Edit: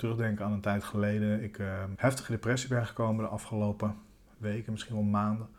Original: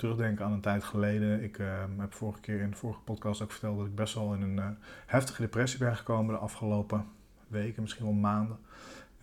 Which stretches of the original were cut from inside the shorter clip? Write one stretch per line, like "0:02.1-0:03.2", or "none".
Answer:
0:02.0-0:05.1